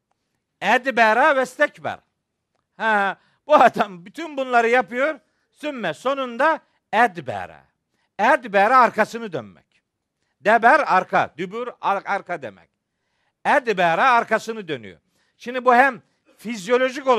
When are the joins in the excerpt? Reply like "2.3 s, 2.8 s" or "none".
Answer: none